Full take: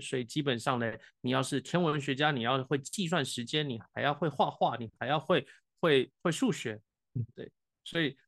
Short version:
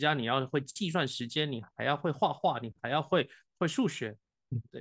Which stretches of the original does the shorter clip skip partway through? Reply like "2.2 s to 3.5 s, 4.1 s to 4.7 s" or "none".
5.7 s to 6.2 s